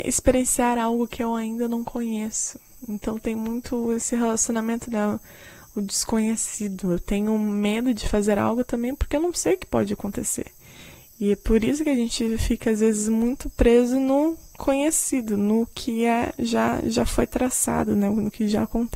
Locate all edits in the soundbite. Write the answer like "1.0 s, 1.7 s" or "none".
none